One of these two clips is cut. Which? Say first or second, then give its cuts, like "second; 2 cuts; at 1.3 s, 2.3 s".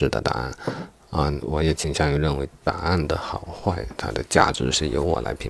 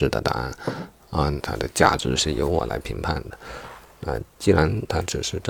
second; 1 cut; at 1.4 s